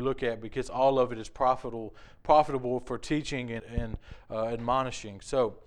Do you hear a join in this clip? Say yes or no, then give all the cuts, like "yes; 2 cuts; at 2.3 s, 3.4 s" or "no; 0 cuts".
yes; 1 cut; at 3.6 s